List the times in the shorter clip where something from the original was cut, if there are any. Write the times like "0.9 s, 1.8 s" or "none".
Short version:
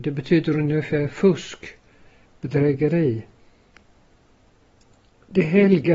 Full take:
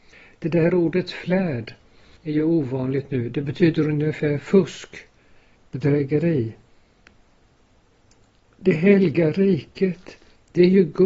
none

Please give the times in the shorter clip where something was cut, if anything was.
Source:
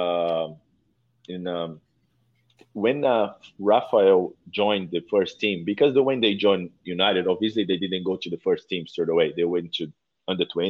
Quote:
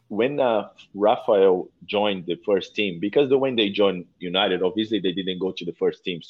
none

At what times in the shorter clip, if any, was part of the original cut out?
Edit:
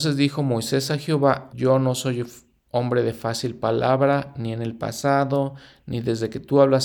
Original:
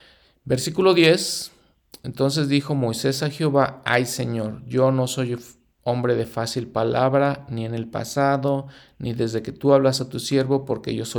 1.5 s

